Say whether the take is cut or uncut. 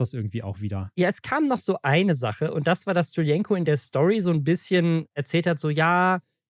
uncut